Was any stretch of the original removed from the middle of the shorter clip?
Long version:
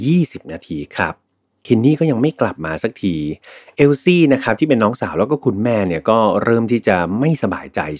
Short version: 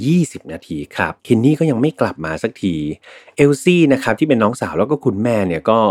yes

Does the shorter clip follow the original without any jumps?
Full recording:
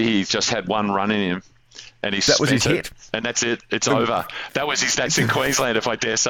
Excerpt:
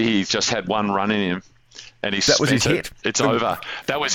no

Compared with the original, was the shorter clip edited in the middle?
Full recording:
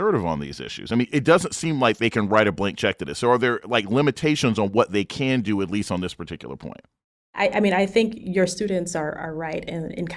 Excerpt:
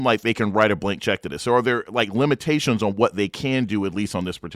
no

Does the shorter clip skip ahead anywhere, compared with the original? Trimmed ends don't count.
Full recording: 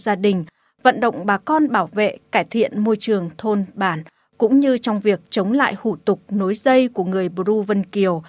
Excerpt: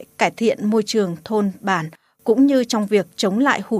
no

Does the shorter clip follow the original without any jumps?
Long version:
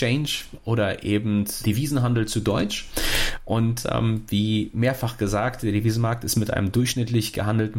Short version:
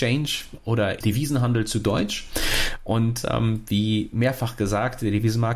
no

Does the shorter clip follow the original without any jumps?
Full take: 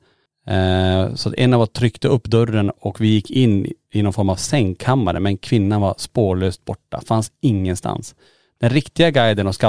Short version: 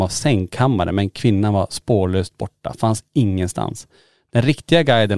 yes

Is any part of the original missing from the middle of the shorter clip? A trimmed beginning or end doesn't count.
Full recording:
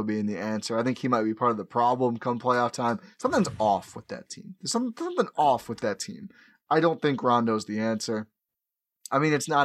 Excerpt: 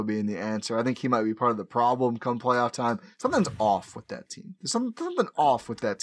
no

